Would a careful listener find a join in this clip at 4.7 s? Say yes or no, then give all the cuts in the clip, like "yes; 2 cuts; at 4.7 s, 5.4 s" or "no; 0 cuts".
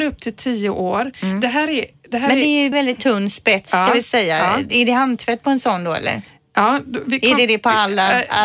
no; 1 cut; at 2.7 s